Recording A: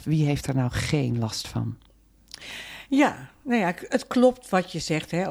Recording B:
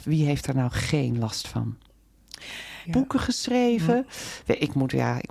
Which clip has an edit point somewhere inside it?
B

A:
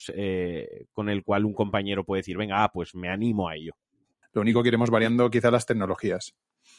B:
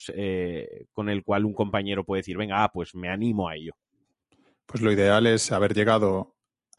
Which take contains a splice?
A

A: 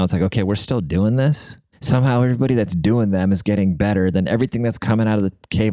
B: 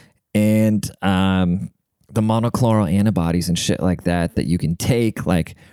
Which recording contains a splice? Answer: A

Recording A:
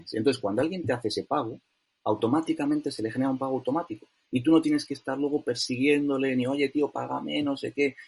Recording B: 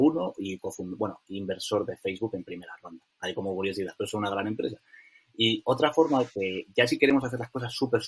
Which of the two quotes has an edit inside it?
B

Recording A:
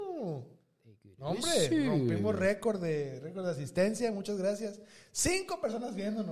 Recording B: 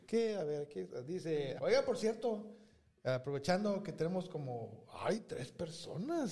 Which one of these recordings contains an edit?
B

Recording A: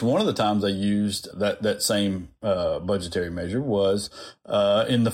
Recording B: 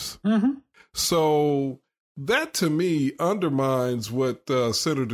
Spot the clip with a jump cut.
A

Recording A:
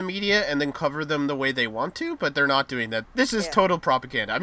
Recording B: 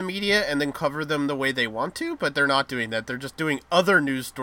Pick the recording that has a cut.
A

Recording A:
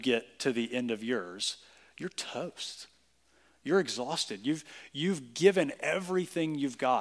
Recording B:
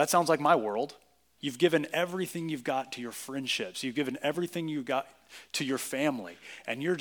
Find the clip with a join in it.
B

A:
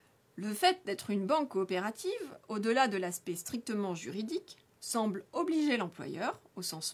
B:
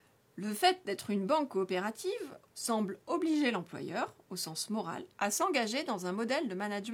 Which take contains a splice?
B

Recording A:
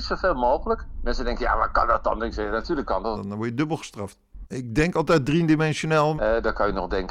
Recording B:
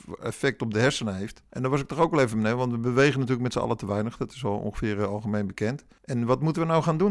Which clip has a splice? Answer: A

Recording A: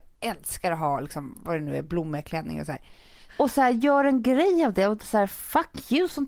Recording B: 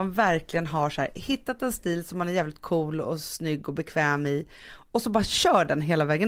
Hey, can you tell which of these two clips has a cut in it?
A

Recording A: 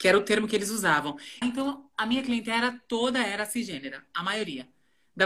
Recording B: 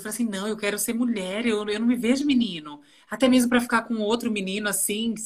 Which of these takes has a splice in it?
A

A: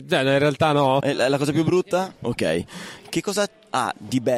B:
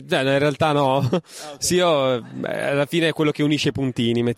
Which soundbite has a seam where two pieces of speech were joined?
A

